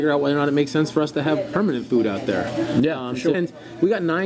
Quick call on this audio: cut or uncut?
cut